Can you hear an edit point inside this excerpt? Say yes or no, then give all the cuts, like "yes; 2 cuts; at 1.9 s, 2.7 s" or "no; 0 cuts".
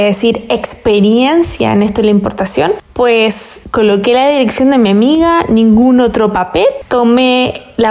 no; 0 cuts